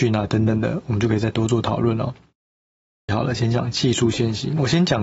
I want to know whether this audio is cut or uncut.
cut